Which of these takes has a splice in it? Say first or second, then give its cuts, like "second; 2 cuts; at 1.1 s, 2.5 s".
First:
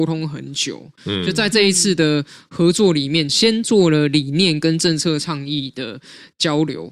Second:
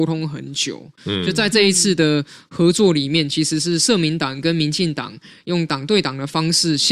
first; 1 cut; at 3.3 s